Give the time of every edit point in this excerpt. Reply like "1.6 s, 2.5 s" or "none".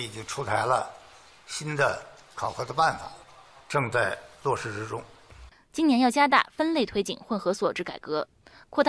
5.7 s